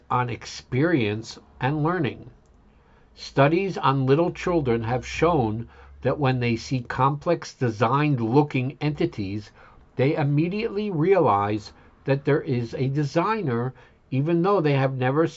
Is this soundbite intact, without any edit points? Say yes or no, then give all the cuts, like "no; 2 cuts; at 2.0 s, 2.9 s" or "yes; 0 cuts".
yes; 0 cuts